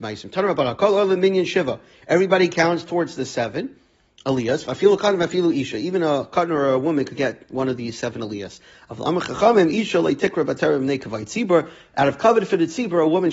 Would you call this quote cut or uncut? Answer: uncut